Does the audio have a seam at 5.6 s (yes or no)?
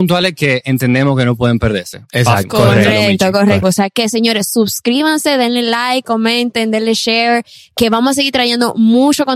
no